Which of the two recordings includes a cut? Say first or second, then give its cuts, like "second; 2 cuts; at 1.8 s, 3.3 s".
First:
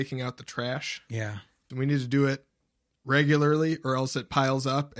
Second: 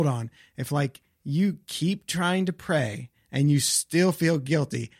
first; 1 cut; at 1.7 s